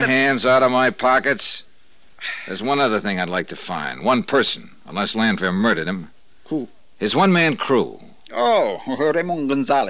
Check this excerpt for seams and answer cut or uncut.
uncut